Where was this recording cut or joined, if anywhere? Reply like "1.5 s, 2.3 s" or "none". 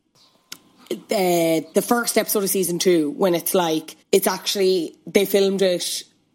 1.7 s, 4.0 s